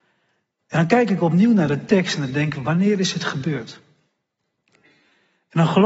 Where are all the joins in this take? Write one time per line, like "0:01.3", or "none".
none